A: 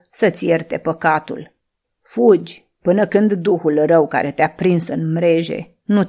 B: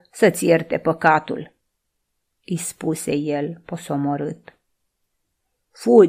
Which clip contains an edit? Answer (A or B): A